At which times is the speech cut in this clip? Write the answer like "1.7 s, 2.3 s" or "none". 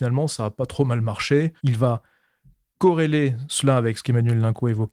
1.6 s

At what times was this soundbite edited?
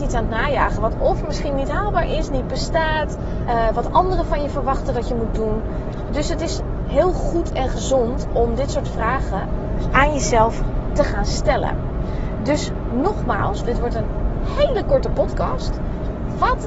3.5 s, 13.6 s

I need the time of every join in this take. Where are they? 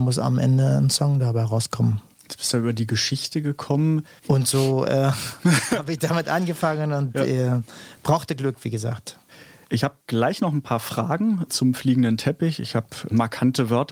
4.2 s

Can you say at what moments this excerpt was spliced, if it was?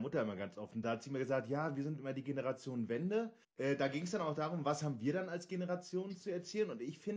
3.4 s

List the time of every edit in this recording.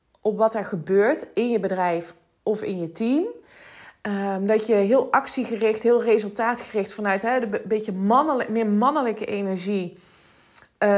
none

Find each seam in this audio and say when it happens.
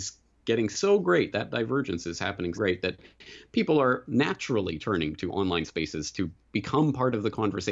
2.5 s

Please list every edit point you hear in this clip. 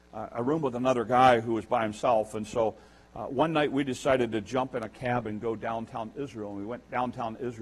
none

